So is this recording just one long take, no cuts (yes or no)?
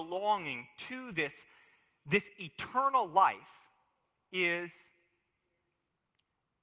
yes